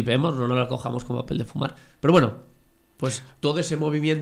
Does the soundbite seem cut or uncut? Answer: uncut